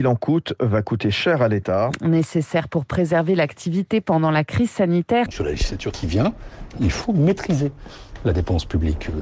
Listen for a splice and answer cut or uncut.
cut